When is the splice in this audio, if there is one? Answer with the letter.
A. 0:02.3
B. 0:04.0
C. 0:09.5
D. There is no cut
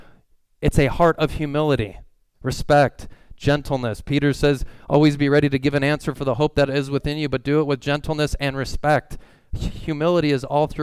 A